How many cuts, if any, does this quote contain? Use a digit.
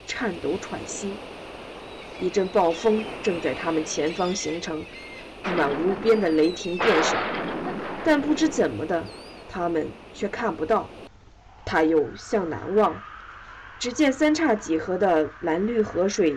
1